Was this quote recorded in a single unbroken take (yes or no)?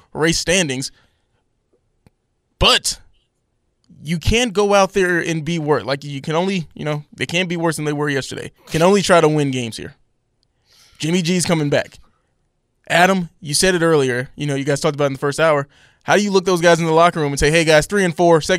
no